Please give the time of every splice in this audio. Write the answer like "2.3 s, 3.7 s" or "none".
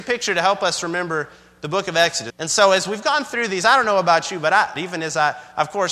2.3 s, 4.8 s